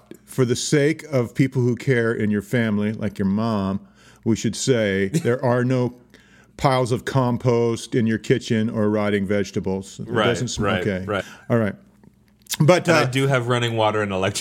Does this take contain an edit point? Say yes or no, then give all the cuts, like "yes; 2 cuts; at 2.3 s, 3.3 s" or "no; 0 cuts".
yes; 1 cut; at 11.2 s